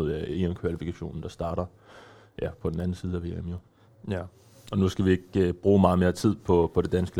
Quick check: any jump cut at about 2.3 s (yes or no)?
no